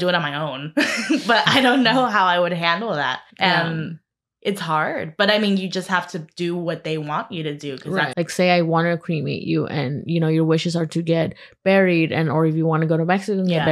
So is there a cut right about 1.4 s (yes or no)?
no